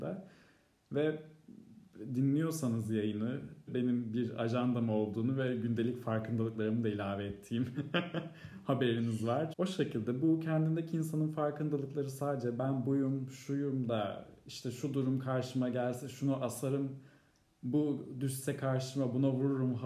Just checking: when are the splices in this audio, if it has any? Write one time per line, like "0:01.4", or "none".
0:03.7
0:09.5